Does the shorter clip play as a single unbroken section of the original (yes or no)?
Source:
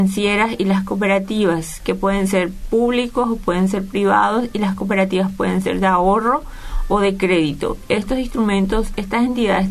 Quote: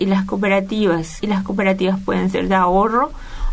no